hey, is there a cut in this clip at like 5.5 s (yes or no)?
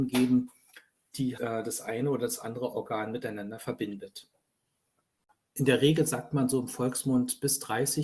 no